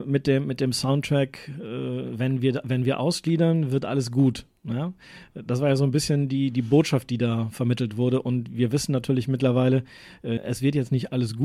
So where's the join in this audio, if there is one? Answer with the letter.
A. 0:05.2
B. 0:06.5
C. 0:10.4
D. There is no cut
C